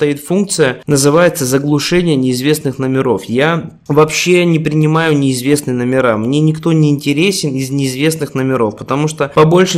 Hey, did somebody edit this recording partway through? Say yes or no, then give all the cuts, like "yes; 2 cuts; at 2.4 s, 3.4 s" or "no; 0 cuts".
no; 0 cuts